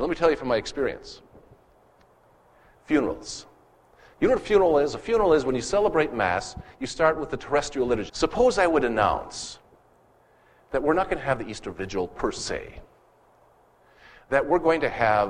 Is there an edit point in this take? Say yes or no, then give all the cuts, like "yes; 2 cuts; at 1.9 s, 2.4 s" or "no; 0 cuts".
yes; 1 cut; at 8.1 s